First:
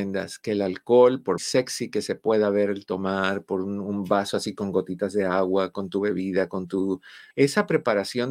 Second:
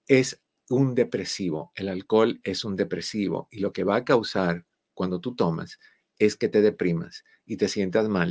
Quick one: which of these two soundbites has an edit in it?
first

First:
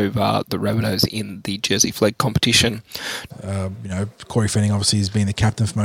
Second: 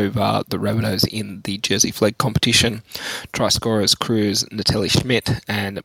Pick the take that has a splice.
first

